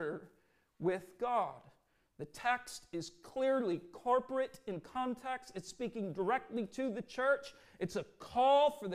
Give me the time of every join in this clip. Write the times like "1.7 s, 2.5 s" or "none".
none